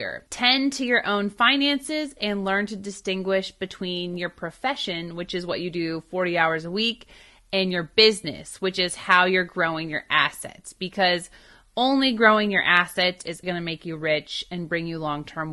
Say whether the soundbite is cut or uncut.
cut